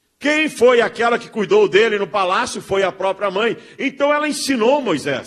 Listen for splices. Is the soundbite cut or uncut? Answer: uncut